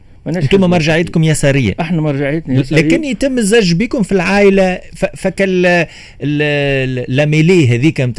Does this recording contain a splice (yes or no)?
no